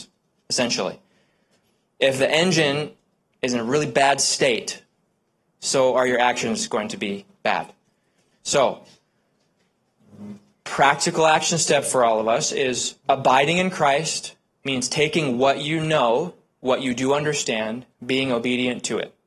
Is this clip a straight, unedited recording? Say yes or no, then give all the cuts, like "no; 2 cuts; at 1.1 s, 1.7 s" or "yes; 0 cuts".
no; 2 cuts; at 8.3 s, 13.0 s